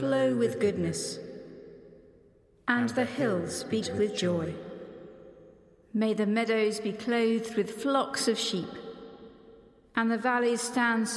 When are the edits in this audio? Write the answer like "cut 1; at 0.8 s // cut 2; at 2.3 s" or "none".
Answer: cut 1; at 3.8 s